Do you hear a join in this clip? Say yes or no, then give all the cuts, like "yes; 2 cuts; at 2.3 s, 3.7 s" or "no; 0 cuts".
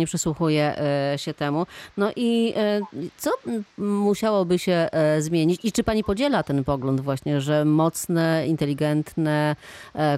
no; 0 cuts